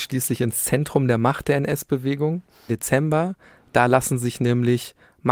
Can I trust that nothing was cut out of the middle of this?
no; 1 cut; at 2.7 s

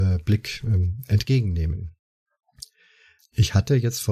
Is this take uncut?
no; 1 cut; at 3.2 s

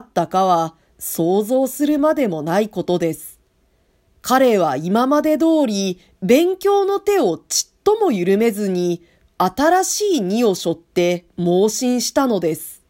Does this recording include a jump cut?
no; 0 cuts

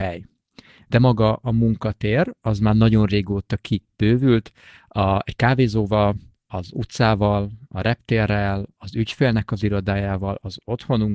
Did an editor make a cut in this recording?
no; 0 cuts

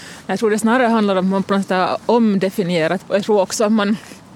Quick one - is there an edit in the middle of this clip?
yes; 1 cut; at 3.0 s

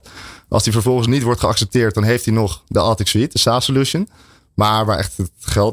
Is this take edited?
no; 0 cuts

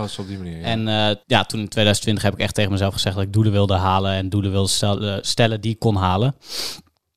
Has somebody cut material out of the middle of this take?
yes; 1 cut; at 1.2 s

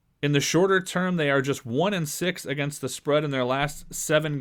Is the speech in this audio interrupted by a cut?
no; 0 cuts

